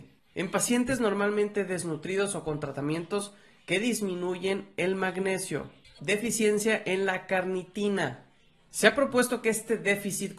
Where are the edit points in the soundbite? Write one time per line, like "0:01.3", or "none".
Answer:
0:06.0